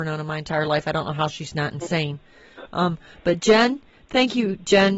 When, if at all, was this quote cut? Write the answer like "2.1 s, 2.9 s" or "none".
none